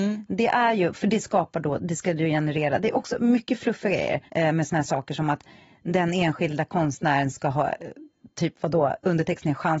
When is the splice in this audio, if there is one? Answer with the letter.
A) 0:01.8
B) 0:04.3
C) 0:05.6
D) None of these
B